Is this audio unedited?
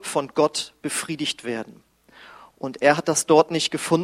yes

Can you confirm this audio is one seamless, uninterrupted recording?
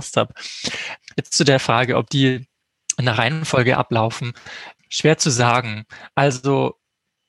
yes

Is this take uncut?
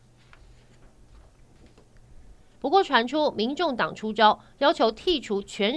no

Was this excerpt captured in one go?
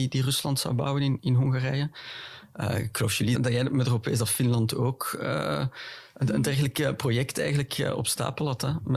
no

